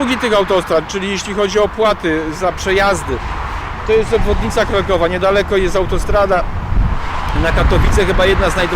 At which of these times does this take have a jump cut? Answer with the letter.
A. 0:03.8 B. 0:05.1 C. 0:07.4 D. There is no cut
D